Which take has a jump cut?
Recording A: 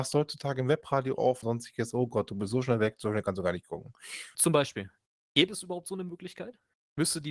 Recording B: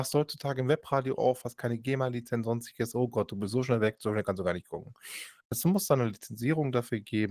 A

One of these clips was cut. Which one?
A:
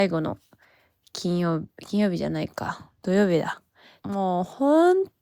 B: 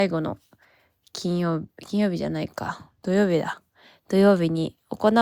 A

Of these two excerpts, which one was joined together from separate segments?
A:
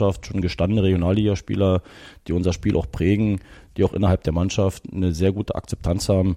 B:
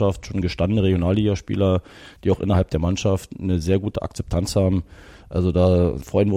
B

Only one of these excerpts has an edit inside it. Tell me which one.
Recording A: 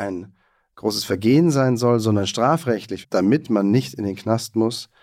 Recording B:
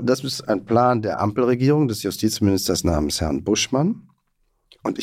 A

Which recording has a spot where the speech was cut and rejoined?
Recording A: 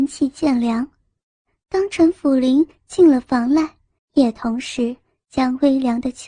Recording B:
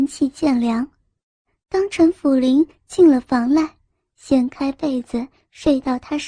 A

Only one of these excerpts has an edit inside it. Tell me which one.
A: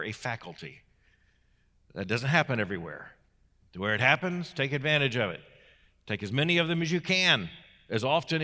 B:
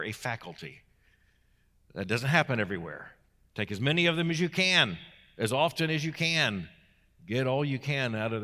B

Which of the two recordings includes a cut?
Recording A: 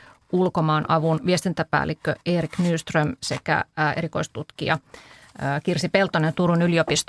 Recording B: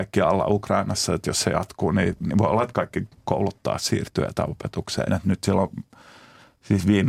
B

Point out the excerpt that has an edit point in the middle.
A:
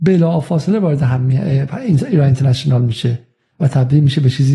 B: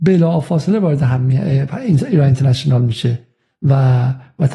A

